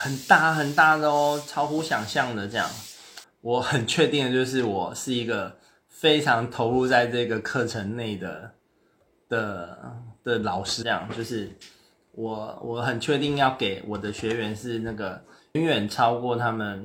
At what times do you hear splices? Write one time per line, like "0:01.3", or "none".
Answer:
0:03.2
0:10.8
0:15.5